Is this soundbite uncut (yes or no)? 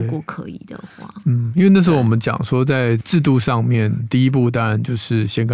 yes